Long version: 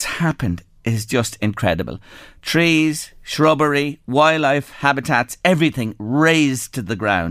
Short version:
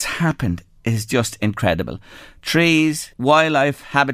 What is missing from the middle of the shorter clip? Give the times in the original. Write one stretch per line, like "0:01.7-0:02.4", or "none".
0:03.1-0:04.0